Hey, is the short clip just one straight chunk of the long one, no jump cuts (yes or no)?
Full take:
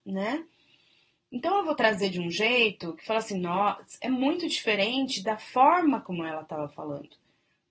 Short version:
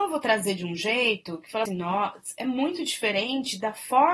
no